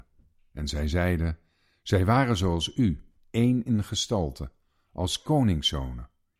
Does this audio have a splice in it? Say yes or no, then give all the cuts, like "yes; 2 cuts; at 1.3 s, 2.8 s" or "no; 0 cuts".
no; 0 cuts